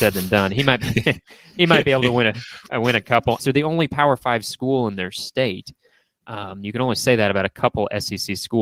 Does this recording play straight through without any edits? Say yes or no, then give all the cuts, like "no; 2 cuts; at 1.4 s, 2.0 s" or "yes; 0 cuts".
no; 1 cut; at 3.4 s